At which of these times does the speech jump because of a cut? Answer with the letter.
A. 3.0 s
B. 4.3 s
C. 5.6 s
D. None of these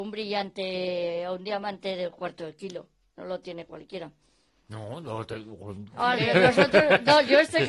D